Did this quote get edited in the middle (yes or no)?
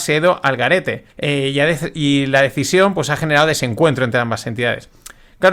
yes